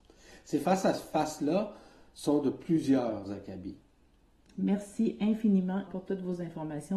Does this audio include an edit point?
yes; 2 cuts; at 4.5 s, 5.9 s

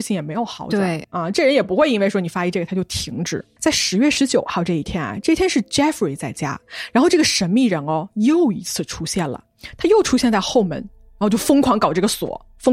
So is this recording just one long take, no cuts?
no; 1 cut; at 3.6 s

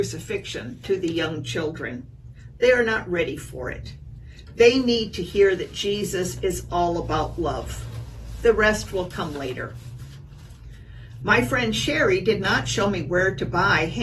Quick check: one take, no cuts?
no; 1 cut; at 11.2 s

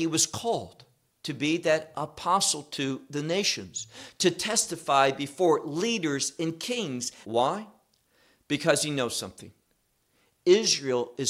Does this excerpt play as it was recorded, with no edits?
no; 1 cut; at 7.2 s

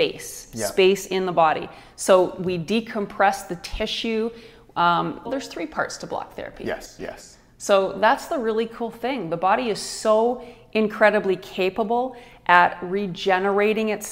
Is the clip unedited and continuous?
no; 2 cuts; at 5.2 s, 7.0 s

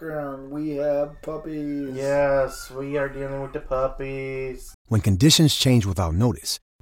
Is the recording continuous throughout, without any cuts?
no; 1 cut; at 4.7 s

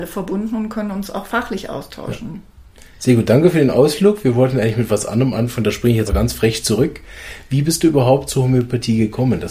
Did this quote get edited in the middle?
yes; 1 cut; at 6.1 s

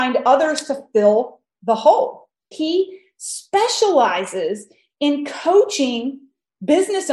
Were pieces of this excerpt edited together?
yes; 1 cut; at 2.5 s

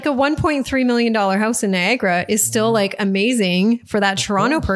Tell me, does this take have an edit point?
no; 0 cuts

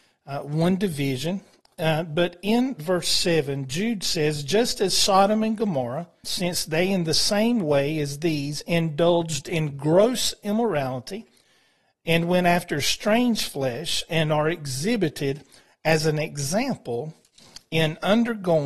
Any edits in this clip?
yes; 1 cut; at 6.2 s

